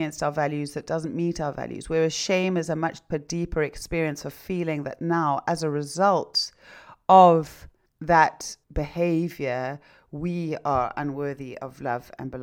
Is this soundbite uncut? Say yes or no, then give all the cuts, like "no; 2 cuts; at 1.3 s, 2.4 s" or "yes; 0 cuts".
no; 2 cuts; at 3.1 s, 8.6 s